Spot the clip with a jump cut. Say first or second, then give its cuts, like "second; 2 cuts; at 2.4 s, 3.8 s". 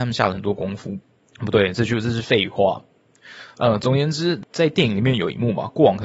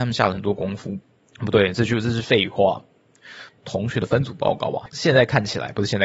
second; 2 cuts; at 3.5 s, 4.9 s